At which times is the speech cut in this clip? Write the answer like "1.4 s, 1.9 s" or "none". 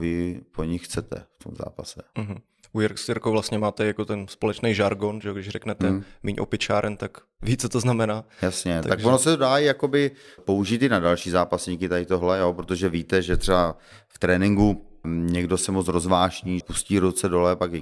10.4 s, 15.0 s, 16.6 s